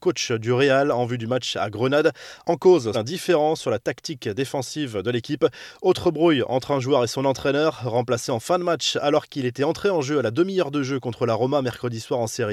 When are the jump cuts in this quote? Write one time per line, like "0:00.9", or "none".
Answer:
0:02.9